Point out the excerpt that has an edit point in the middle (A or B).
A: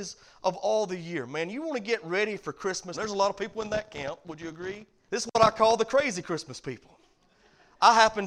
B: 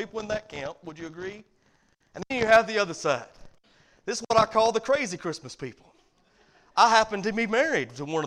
A